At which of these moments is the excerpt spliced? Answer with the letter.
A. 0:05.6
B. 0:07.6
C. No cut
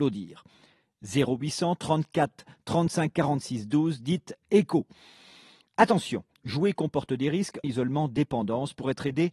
B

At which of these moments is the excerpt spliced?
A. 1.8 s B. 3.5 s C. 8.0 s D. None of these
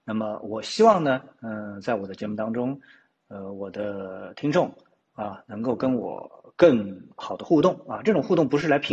D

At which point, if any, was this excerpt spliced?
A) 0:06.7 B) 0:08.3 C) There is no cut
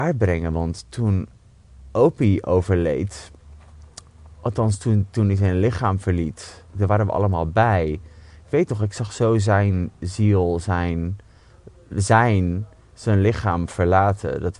A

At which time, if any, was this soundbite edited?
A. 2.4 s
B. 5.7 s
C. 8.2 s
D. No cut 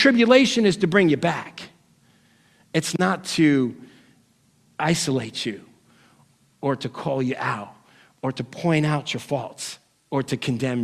D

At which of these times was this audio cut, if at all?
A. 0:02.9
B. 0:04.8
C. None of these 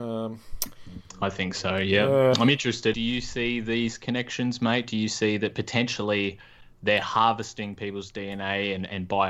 A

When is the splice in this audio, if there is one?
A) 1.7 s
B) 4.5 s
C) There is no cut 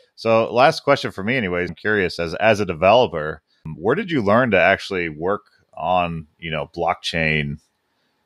A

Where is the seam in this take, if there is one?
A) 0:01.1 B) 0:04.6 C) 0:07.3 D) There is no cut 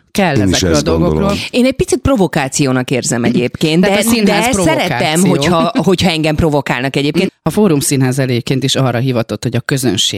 C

